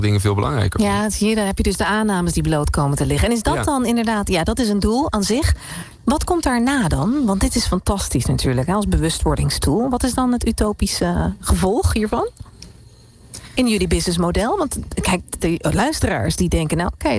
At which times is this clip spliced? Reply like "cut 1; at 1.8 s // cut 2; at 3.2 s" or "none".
cut 1; at 15.4 s